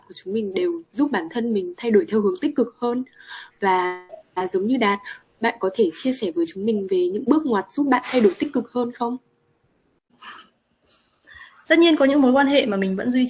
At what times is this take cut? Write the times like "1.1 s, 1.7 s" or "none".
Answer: 3.5 s, 7.2 s, 11.6 s